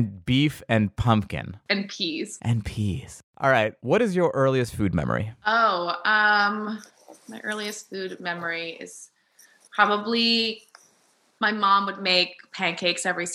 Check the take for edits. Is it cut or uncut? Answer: uncut